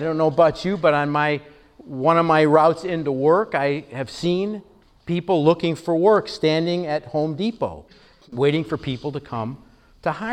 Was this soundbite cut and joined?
no; 0 cuts

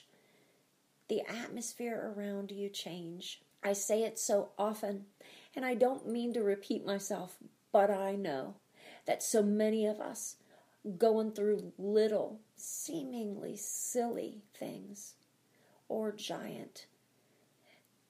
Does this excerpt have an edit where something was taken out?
yes; 2 cuts; at 3.5 s, 12.5 s

